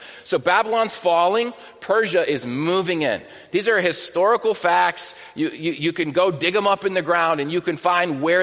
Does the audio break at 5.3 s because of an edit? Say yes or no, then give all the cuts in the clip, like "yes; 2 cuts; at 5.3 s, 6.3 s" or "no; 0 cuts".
no; 0 cuts